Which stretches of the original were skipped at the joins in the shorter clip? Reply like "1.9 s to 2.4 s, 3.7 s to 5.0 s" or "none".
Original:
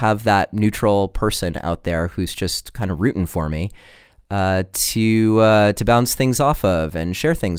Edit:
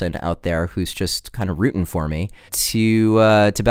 3.9 s to 4.7 s